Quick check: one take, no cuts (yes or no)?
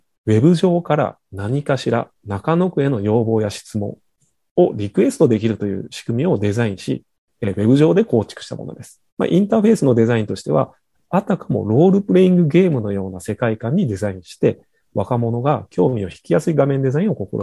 no